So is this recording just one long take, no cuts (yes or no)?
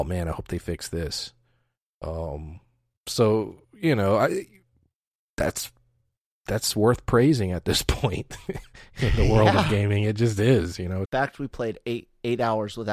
no